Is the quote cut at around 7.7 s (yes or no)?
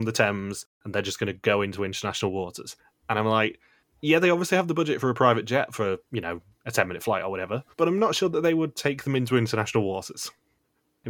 yes